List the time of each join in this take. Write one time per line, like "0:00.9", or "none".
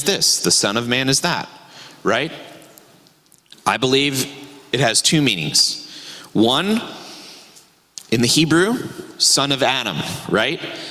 none